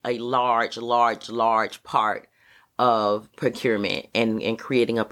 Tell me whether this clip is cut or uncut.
uncut